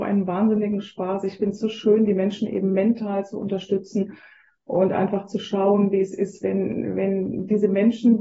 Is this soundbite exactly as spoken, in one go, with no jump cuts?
yes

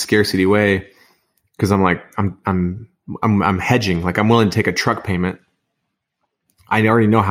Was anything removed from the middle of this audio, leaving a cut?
no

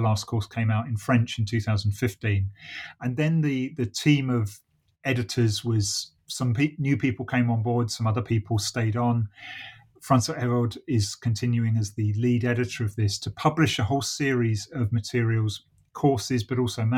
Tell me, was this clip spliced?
no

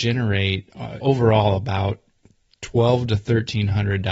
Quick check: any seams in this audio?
yes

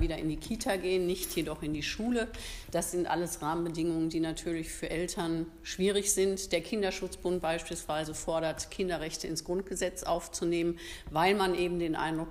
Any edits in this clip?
no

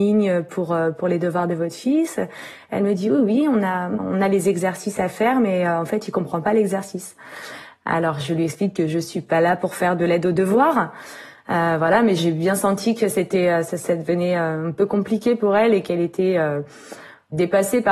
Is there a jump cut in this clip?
no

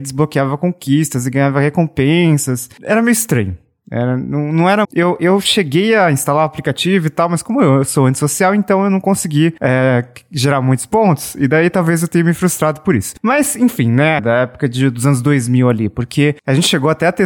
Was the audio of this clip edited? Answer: yes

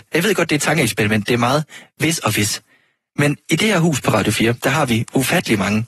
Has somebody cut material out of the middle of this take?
no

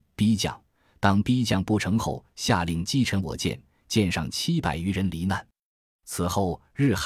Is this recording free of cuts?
yes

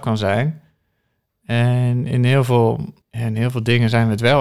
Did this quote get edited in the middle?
yes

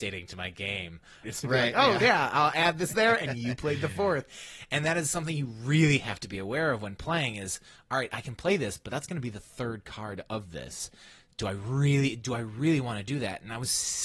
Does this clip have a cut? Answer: yes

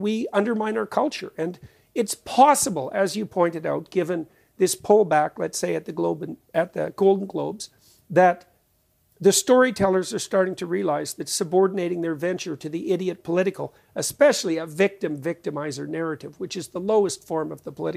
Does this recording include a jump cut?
no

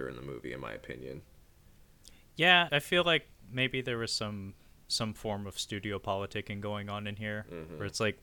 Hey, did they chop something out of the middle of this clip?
yes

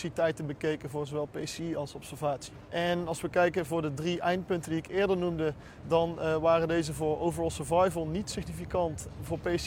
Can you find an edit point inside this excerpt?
yes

